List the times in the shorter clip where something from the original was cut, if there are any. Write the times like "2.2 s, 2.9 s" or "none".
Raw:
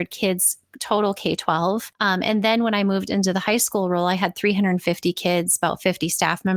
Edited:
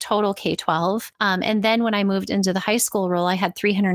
none